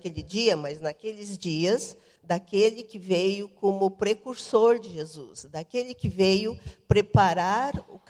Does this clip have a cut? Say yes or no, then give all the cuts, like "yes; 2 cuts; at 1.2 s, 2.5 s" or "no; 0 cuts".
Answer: yes; 1 cut; at 2.2 s